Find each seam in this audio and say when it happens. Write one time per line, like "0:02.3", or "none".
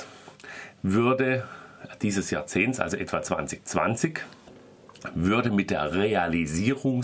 none